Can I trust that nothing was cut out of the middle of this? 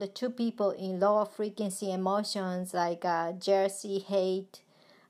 yes; 0 cuts

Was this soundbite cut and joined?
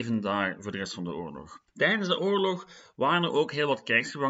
yes; 1 cut; at 1.7 s

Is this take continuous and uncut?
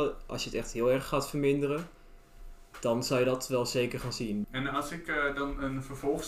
no; 1 cut; at 4.4 s

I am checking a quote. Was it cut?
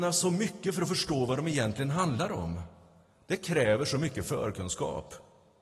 no; 0 cuts

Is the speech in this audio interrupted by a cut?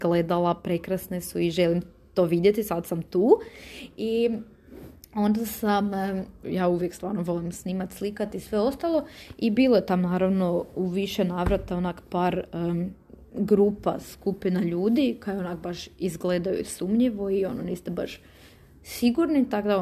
yes; 1 cut; at 6.4 s

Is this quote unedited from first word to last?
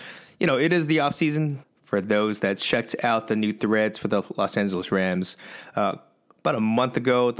no; 1 cut; at 1.6 s

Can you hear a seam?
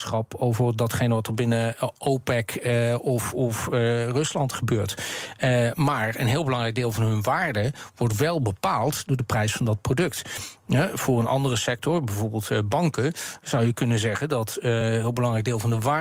no; 0 cuts

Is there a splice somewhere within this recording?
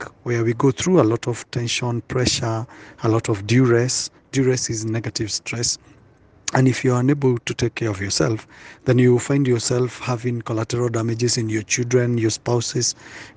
no; 0 cuts

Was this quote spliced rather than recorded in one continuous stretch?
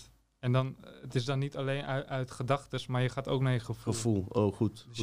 no; 0 cuts

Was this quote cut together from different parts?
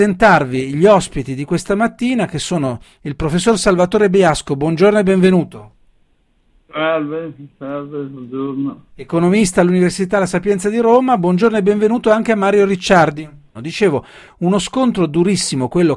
yes; 1 cut; at 13.5 s

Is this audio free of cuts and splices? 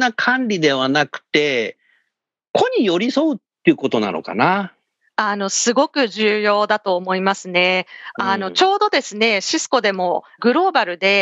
yes; 0 cuts

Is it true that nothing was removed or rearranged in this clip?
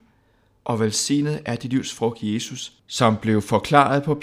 yes; 0 cuts

